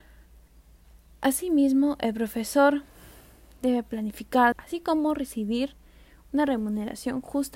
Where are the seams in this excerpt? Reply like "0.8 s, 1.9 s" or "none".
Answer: 4.5 s